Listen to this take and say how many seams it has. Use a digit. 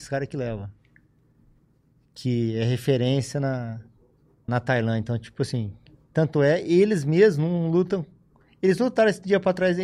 1